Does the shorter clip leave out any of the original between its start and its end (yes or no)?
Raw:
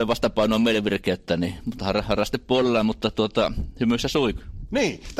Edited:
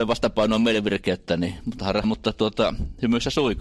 yes